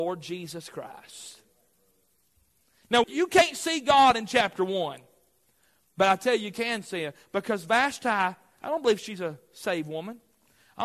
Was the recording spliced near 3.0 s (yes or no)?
yes